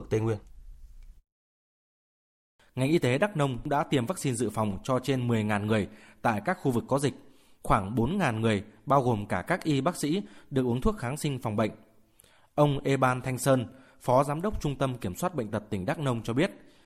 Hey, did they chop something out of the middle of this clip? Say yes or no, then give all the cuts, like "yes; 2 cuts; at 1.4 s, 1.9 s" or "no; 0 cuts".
no; 0 cuts